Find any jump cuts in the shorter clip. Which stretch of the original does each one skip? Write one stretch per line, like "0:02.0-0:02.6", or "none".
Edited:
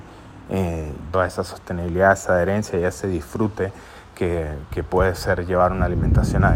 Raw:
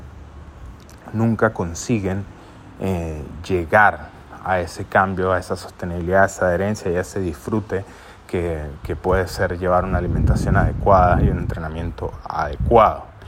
0:03.4-0:05.3

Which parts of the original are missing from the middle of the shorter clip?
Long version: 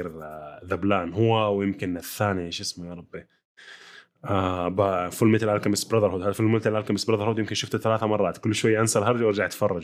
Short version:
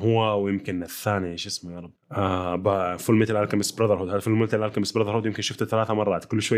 0:03.1-0:04.1

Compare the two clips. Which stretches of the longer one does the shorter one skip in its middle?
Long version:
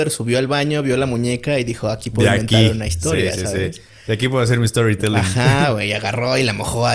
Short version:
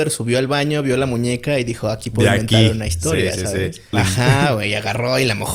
0:03.9-0:05.1

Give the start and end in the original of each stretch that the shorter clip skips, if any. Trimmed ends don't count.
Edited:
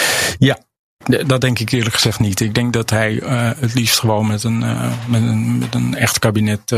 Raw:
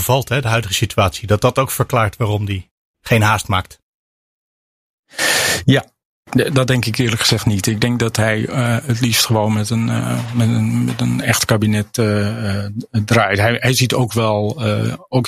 none

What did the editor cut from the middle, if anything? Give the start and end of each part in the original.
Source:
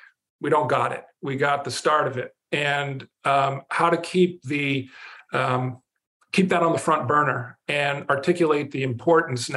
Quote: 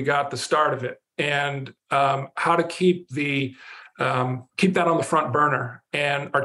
0:05.8-0:06.3

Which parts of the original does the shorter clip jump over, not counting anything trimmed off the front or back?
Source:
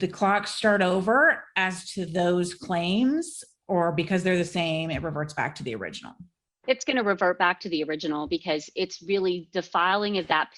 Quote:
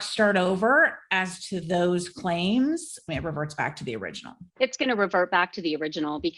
0:03.5-0:04.9
0:06.3-0:06.6

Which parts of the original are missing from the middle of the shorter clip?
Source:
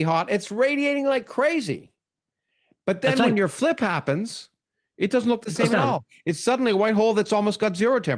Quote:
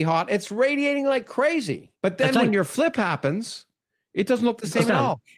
0:02.0-0:02.8

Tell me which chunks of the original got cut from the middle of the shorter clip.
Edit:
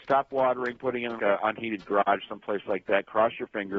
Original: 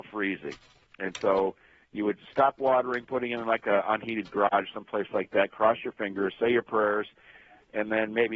0:03.4-0:03.6

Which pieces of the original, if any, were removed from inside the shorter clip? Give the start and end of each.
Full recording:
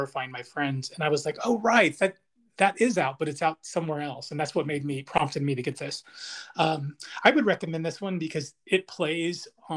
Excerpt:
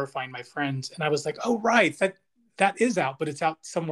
none

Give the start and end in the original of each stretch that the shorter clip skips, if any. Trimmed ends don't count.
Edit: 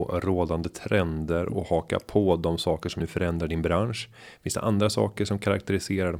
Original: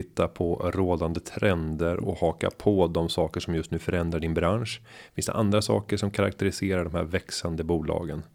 0:03.5-0:03.7

